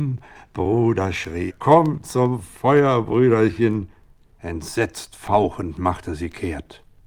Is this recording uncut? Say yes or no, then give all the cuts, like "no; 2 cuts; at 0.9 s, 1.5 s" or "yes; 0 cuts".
no; 2 cuts; at 1.5 s, 4.4 s